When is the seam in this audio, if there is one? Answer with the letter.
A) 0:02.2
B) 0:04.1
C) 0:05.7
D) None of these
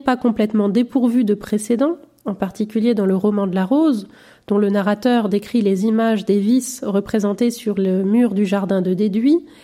D